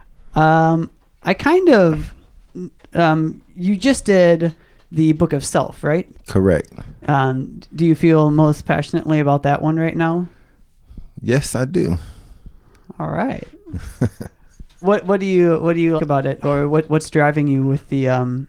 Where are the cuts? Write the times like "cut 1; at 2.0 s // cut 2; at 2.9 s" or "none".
cut 1; at 6.1 s // cut 2; at 14.8 s // cut 3; at 16.0 s